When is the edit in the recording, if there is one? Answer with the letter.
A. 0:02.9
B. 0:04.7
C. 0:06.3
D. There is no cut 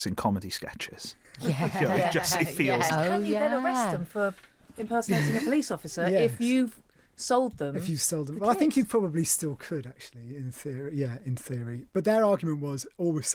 A